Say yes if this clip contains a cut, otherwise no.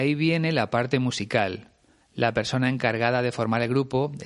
yes